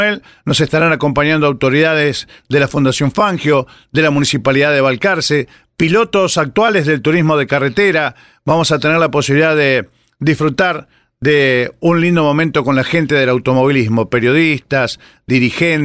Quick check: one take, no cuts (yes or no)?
yes